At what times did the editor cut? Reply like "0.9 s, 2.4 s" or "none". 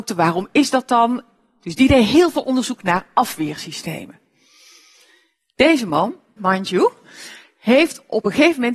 6.4 s